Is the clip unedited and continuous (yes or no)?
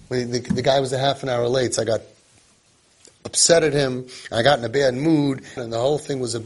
no